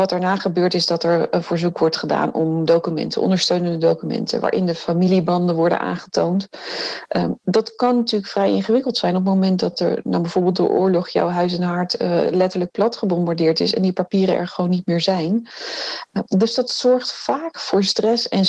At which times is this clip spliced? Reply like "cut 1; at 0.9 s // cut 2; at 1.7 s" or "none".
none